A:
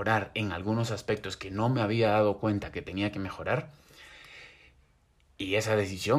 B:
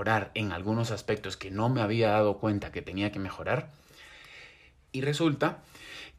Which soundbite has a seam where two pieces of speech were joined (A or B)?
B